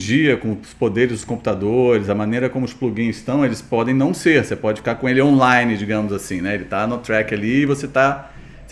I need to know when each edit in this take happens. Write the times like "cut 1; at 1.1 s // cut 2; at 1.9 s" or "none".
none